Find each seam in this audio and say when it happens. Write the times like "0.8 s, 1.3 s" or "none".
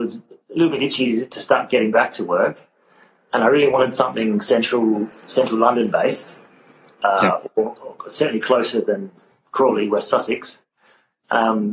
none